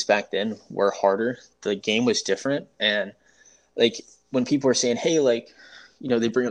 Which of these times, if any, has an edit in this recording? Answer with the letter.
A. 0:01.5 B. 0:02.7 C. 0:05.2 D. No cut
D